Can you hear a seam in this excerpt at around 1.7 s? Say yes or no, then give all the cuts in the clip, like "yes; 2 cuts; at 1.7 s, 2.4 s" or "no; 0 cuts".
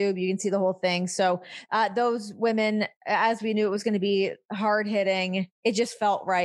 no; 1 cut; at 5.5 s